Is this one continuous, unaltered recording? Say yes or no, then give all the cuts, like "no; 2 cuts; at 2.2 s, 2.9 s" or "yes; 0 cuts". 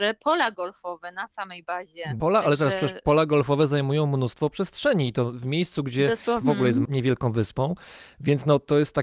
no; 1 cut; at 6.4 s